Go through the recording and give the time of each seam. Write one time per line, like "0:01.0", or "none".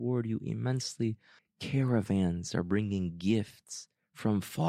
0:01.4